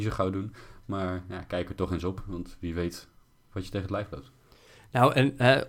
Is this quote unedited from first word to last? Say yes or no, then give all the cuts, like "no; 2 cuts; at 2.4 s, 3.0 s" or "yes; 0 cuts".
yes; 0 cuts